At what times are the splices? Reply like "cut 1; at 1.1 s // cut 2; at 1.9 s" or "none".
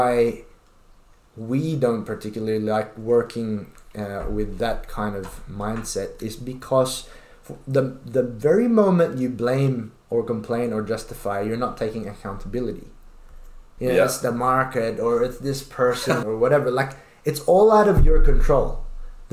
cut 1; at 13.8 s // cut 2; at 16.2 s